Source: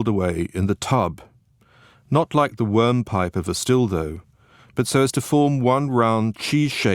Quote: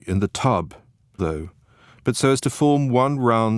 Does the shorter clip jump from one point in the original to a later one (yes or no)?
yes